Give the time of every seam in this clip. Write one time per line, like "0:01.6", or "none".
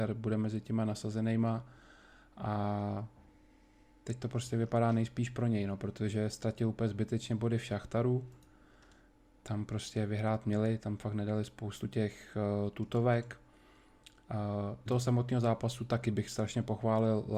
0:14.9